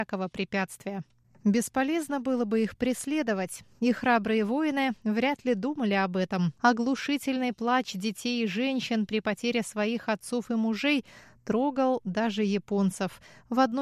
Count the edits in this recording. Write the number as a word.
one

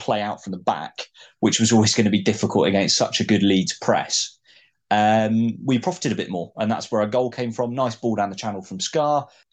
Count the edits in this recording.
zero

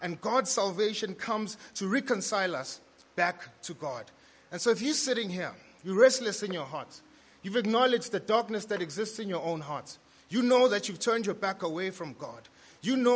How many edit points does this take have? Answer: zero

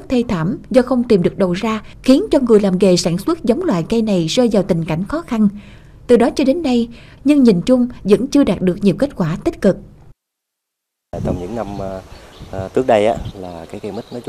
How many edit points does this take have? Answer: two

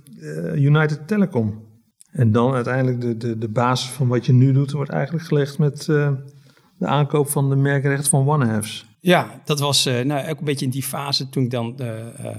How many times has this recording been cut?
one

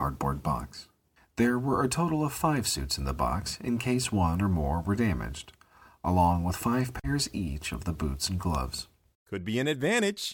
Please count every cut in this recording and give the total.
one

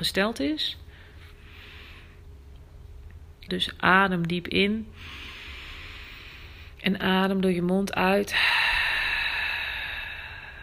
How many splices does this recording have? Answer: one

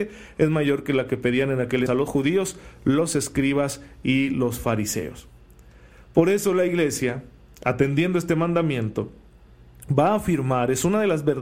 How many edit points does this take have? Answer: one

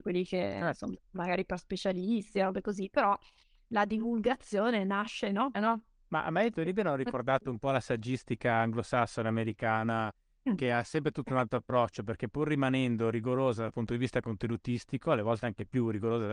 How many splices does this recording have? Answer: one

